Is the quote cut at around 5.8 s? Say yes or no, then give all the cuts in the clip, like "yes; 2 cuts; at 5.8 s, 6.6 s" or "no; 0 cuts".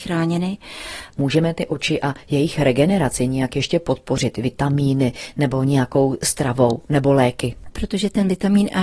no; 2 cuts; at 1.1 s, 7.7 s